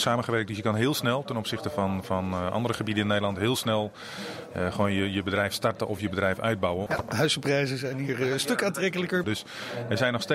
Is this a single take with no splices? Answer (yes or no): no